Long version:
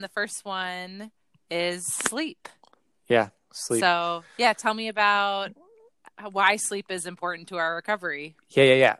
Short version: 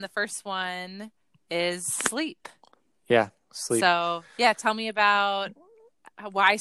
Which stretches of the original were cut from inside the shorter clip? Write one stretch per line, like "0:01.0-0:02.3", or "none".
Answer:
none